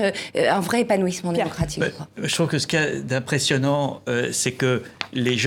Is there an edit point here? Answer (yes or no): no